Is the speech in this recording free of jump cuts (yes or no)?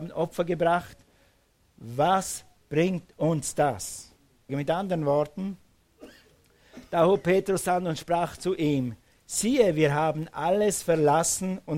no